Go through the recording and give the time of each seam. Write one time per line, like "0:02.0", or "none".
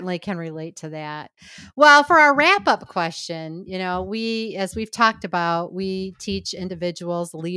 none